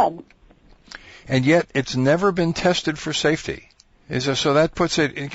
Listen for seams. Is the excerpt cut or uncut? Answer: cut